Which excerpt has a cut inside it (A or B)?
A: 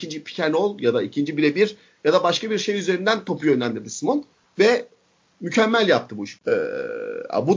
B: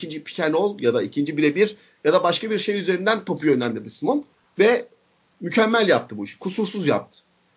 A